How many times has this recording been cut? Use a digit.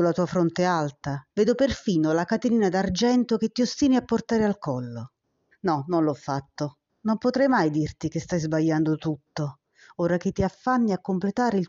2